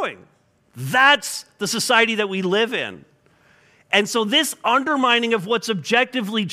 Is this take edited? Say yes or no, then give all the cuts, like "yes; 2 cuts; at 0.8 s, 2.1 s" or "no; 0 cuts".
no; 0 cuts